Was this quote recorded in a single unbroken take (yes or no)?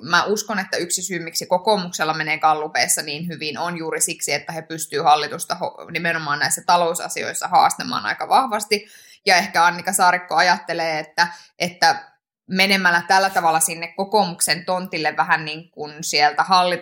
yes